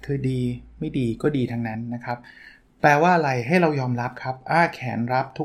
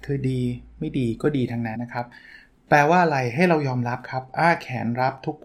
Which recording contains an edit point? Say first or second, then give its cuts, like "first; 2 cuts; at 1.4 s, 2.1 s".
second; 1 cut; at 1.7 s